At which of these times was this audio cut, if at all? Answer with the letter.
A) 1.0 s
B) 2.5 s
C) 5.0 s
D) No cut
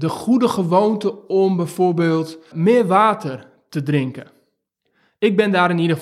B